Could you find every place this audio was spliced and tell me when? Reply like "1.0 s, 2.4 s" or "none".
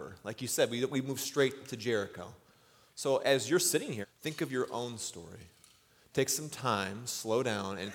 4.0 s